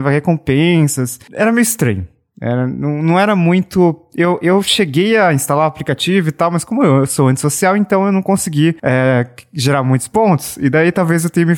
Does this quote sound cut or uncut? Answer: uncut